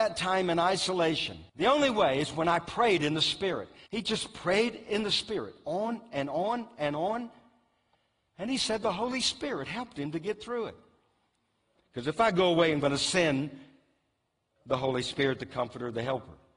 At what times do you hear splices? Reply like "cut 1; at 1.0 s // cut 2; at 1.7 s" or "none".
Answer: cut 1; at 1.5 s // cut 2; at 3.9 s // cut 3; at 11.8 s